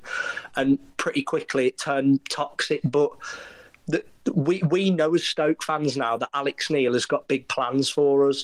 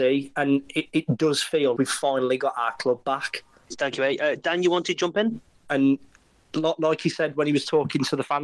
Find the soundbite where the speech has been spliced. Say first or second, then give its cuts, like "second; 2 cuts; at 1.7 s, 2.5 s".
second; 2 cuts; at 1.8 s, 5.7 s